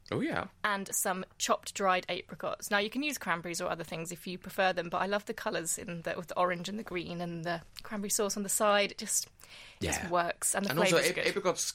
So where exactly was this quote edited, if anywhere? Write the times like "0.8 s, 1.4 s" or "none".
none